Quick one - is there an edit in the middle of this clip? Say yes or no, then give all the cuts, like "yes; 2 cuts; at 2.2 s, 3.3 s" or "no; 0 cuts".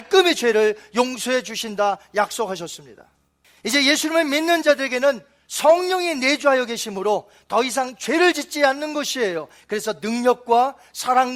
no; 0 cuts